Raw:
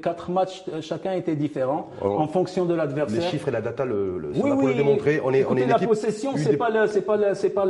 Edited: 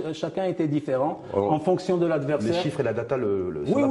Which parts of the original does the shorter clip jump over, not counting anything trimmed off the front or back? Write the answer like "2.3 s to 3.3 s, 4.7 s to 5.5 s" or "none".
none